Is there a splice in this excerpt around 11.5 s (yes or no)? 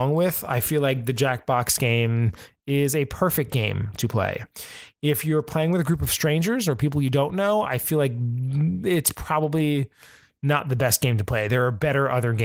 no